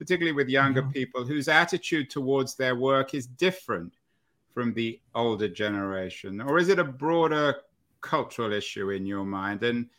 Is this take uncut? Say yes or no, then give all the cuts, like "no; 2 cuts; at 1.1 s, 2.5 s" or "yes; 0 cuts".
yes; 0 cuts